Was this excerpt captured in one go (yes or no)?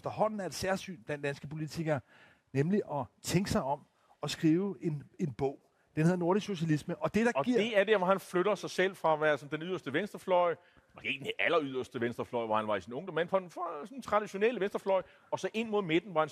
yes